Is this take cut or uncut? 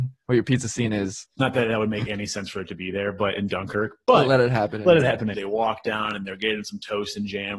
cut